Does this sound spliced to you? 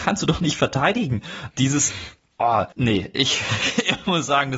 yes; 2 cuts; at 1.5 s, 2.7 s

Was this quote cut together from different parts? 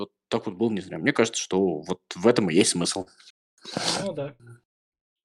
no; 0 cuts

